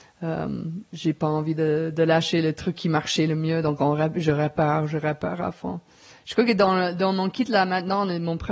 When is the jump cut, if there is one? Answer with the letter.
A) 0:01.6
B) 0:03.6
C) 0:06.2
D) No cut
D